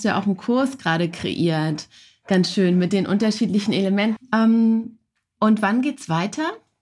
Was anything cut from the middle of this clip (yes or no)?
yes